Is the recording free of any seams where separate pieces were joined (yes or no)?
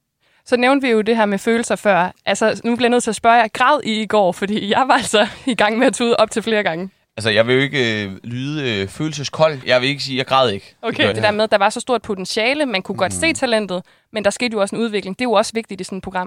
no